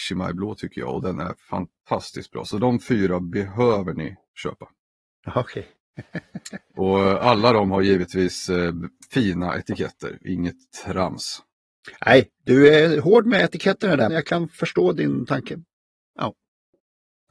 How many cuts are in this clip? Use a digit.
2